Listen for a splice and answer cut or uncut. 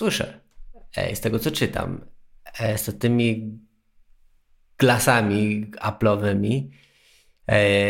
uncut